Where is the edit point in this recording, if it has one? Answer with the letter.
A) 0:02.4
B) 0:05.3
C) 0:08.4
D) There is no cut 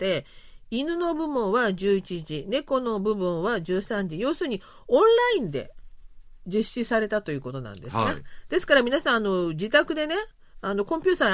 D